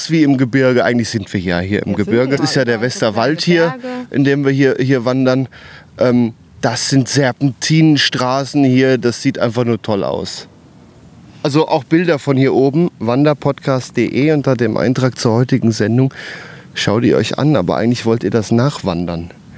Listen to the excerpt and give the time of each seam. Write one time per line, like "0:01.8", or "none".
0:02.4